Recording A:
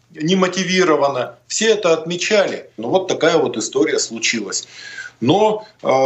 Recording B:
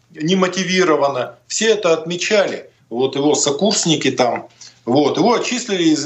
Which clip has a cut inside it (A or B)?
A